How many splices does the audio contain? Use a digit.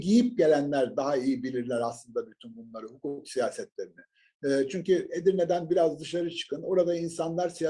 0